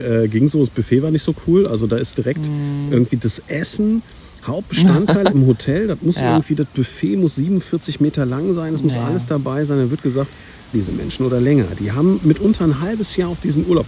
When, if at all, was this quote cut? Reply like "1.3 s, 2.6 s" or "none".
10.7 s

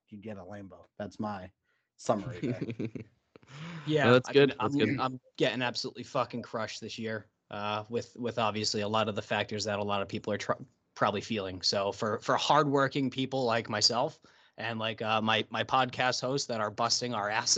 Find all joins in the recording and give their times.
none

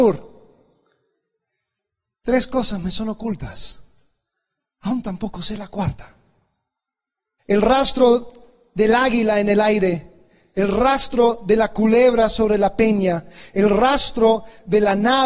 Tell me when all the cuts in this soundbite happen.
7.4 s

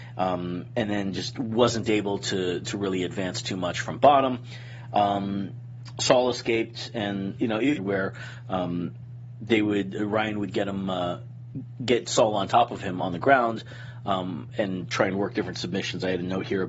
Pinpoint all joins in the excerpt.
7.8 s

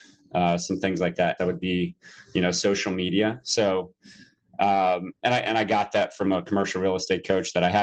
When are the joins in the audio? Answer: 1.4 s

